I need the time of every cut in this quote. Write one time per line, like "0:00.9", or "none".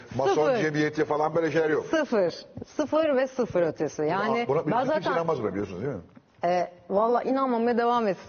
none